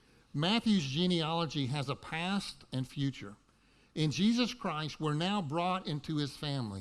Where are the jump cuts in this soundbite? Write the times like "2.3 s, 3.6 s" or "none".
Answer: 2.7 s